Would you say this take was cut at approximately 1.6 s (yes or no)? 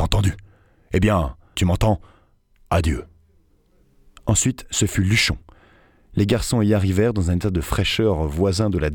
yes